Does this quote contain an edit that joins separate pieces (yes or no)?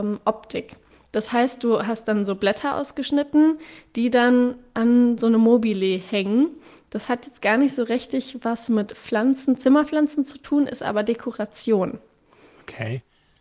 no